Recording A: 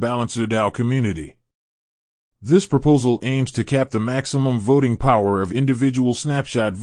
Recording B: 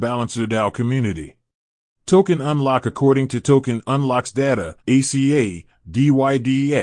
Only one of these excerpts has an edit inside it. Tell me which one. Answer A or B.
B